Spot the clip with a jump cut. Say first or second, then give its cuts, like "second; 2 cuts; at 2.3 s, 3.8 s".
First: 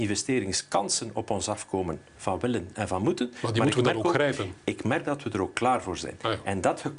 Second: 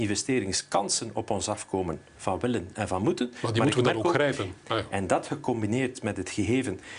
second; 1 cut; at 4.6 s